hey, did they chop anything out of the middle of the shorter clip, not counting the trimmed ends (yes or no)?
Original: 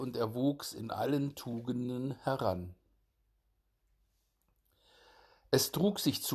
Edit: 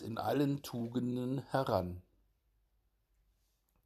no